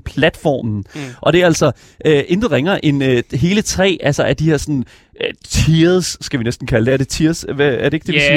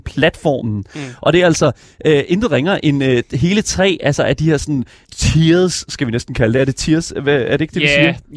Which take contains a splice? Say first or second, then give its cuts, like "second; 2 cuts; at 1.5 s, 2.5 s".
second; 1 cut; at 5.1 s